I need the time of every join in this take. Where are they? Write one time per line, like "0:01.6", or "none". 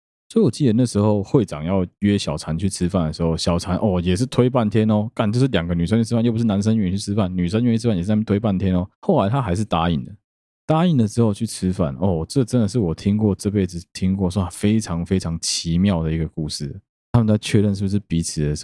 0:16.9